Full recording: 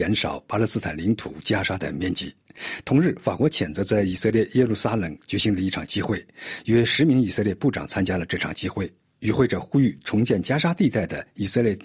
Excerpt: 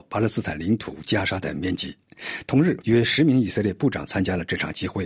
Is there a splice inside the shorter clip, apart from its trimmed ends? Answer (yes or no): yes